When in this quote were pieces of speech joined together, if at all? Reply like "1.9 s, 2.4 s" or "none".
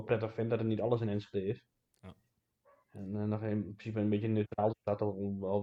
none